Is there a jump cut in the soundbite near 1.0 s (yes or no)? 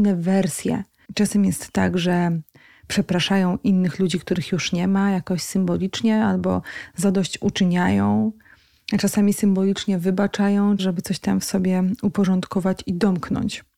yes